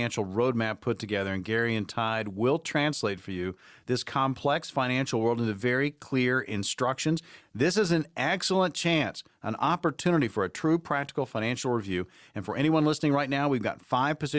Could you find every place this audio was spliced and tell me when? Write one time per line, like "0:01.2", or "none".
0:07.4